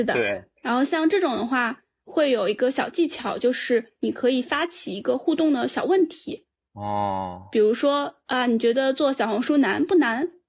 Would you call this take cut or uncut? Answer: uncut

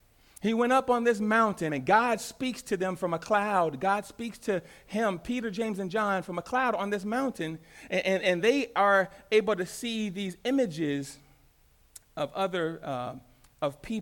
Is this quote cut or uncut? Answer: cut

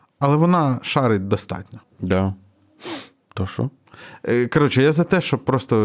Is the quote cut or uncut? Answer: cut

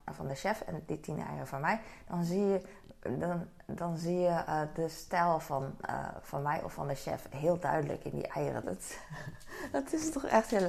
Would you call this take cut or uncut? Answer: cut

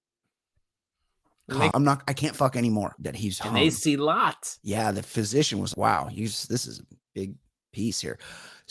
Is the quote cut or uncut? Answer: cut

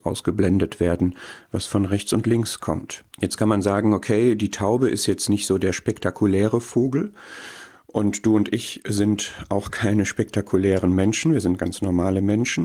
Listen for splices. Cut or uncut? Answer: cut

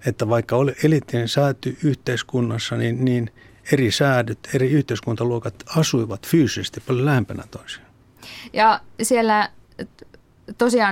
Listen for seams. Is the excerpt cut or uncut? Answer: uncut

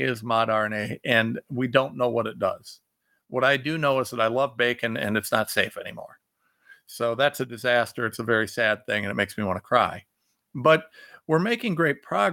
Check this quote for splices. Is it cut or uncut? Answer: uncut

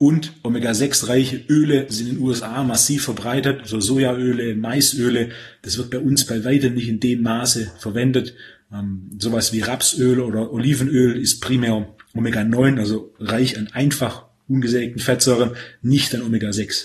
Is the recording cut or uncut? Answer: uncut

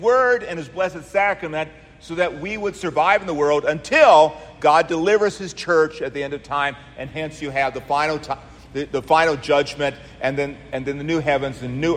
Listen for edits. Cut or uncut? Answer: uncut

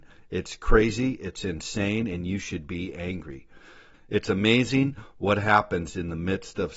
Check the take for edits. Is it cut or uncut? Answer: cut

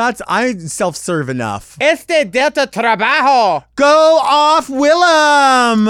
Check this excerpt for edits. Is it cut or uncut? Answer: uncut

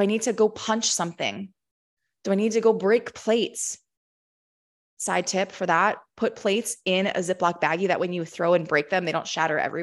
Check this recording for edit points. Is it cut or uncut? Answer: uncut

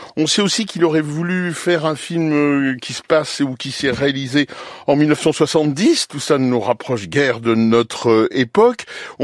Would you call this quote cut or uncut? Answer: uncut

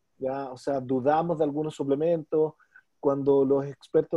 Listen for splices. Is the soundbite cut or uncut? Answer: uncut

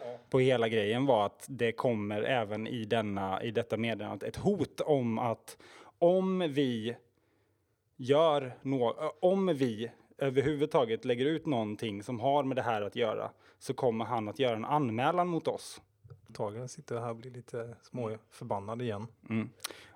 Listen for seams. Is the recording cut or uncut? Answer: cut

